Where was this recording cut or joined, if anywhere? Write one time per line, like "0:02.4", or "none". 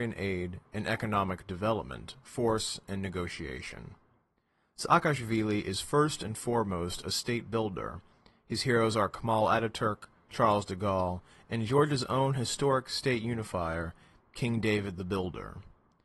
none

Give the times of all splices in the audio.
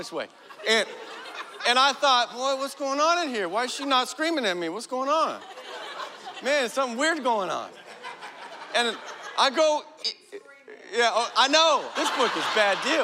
0:10.0
0:11.9

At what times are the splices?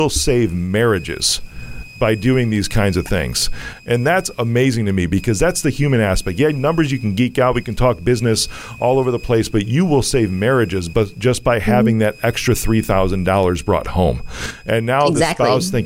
none

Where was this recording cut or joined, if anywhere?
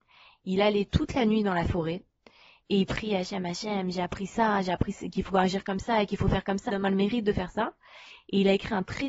0:06.7

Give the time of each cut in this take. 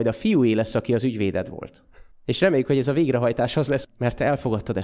0:02.1
0:03.8

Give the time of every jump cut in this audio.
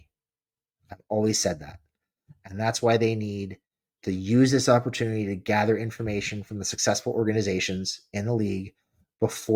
none

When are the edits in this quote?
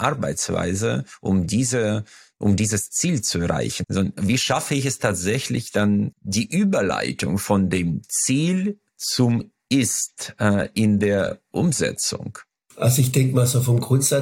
0:03.8
0:06.1

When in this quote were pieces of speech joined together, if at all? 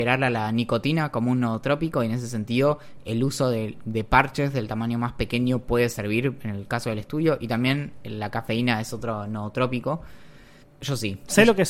0:10.6

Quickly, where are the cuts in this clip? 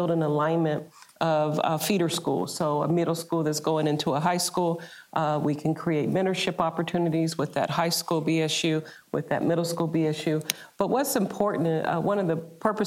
none

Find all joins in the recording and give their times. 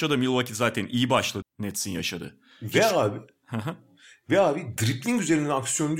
0:01.4

